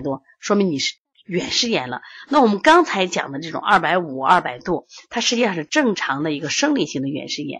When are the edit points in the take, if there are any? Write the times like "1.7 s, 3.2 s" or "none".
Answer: none